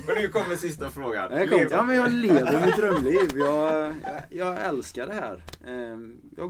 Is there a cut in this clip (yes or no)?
yes